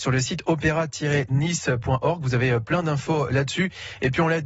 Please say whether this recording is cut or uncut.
uncut